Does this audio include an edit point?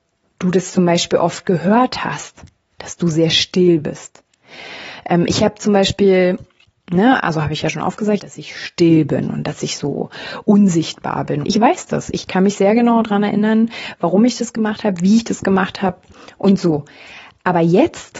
yes; 2 cuts; at 8.2 s, 11.4 s

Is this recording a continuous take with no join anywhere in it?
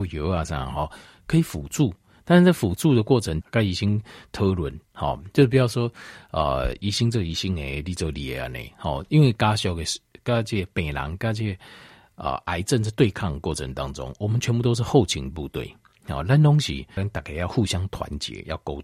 no; 2 cuts; at 3.4 s, 17.0 s

